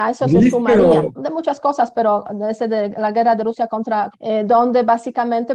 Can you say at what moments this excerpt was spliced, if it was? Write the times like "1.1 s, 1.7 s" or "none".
1.1 s, 4.1 s